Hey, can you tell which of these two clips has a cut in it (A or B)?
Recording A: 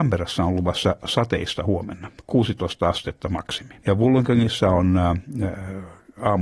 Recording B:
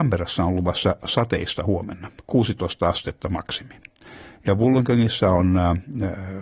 A